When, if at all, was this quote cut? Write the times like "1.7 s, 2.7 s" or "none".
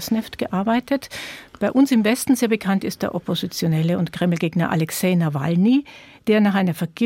none